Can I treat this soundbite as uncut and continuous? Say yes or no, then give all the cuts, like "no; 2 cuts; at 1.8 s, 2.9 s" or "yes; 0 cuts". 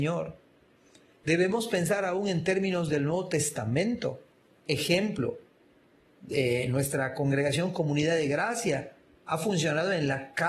no; 1 cut; at 4.5 s